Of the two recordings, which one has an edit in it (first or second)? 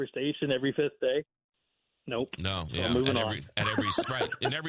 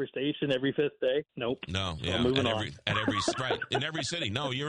second